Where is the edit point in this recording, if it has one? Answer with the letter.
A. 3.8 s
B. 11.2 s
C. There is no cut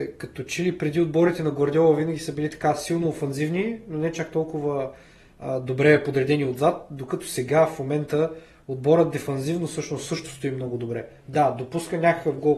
C